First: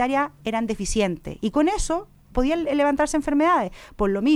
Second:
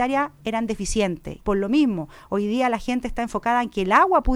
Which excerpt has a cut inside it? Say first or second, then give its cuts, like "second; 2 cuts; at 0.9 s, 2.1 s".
second; 1 cut; at 1.4 s